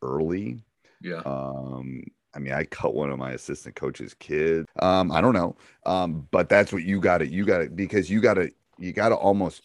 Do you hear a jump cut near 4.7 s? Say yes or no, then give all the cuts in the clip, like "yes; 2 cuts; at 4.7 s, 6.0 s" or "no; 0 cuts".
yes; 1 cut; at 4.7 s